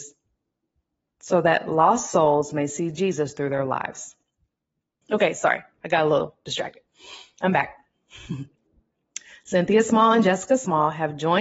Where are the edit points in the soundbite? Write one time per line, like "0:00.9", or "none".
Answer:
0:05.0